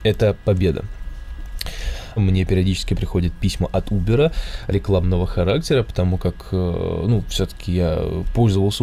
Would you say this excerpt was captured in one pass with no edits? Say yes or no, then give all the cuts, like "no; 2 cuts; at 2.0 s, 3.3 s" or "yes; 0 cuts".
no; 1 cut; at 2.2 s